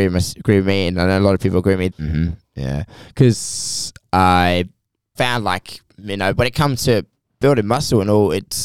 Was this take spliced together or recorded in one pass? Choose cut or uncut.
cut